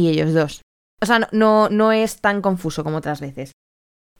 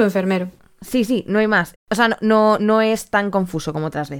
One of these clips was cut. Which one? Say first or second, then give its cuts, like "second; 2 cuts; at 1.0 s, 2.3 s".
second; 1 cut; at 1.7 s